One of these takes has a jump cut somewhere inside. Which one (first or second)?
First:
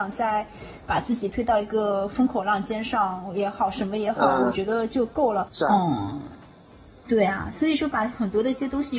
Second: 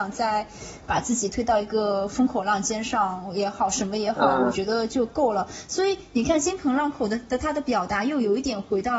first